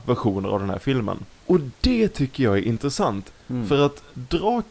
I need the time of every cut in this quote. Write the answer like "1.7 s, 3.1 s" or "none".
1.3 s, 3.3 s